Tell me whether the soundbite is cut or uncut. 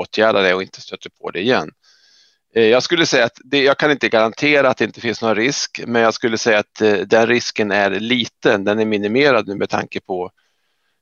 uncut